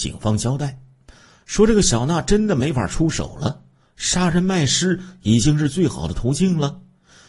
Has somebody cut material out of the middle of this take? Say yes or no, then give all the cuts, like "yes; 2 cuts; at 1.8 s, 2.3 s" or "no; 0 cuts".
no; 0 cuts